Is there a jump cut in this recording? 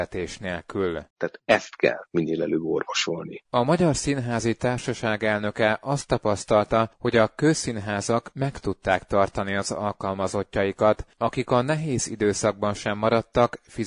yes; 1 cut; at 1.1 s

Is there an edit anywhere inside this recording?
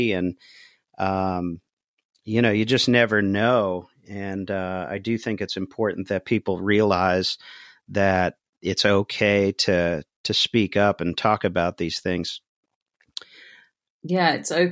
no; 0 cuts

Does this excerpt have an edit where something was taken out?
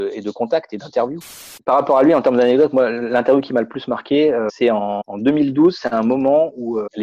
no; 0 cuts

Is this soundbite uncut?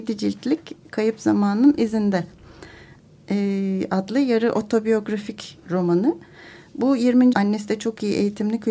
no; 1 cut; at 7.3 s

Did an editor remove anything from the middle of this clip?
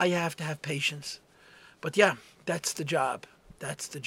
no; 0 cuts

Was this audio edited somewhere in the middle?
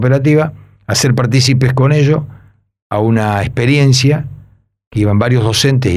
no; 0 cuts

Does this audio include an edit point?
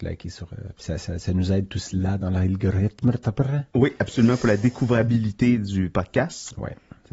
no; 0 cuts

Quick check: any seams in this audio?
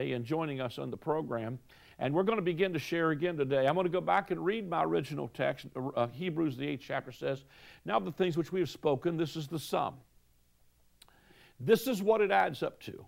no; 0 cuts

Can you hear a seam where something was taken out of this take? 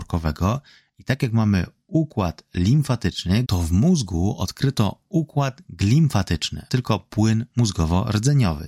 yes; 2 cuts; at 3.4 s, 6.7 s

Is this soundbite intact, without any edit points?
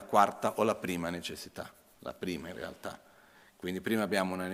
yes; 0 cuts

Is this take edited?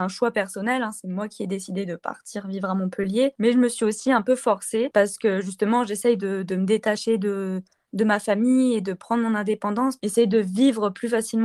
no; 0 cuts

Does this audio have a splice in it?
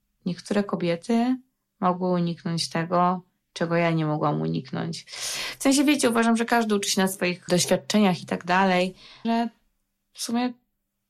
yes; 2 cuts; at 7.5 s, 9.2 s

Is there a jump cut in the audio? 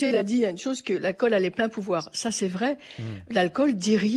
no; 0 cuts

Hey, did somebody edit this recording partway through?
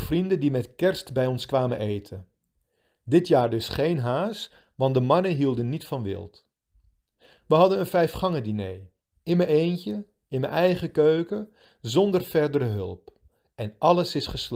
no; 0 cuts

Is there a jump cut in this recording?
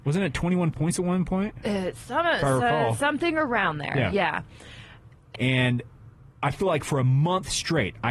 yes; 1 cut; at 5.3 s

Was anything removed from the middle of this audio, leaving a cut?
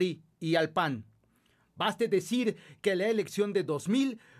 no; 0 cuts

